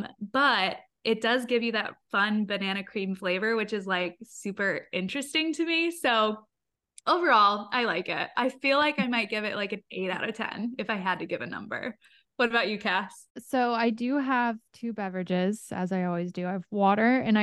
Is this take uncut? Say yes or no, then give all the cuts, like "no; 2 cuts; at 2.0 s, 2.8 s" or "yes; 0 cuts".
yes; 0 cuts